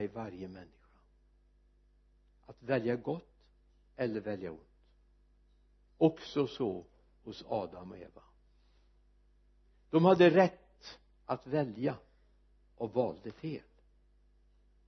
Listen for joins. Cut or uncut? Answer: uncut